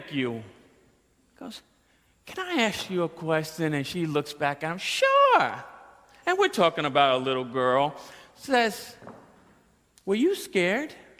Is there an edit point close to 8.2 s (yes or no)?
no